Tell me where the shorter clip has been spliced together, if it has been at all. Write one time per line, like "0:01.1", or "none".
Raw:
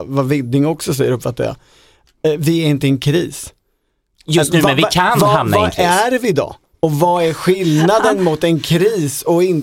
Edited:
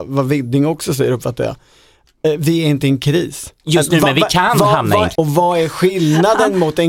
0:03.6
0:05.1